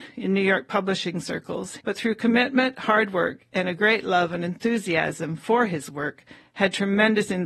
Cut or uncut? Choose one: cut